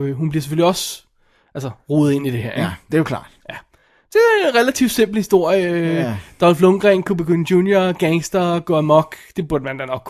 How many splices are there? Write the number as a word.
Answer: zero